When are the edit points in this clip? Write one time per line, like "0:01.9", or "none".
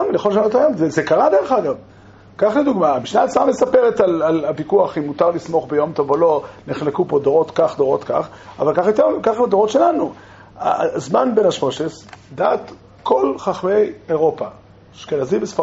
none